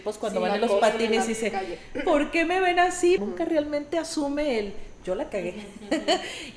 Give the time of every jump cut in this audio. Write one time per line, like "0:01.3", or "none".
0:03.2